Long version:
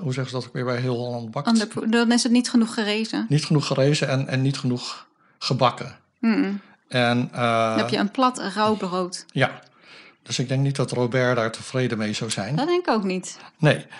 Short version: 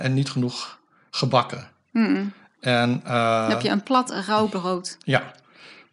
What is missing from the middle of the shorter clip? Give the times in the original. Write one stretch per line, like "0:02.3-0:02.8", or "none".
none